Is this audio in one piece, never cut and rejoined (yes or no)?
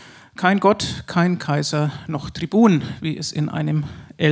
yes